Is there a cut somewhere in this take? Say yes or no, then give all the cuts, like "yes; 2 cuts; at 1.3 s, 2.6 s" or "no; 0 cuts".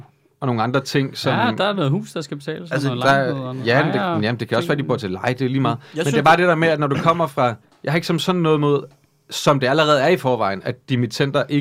no; 0 cuts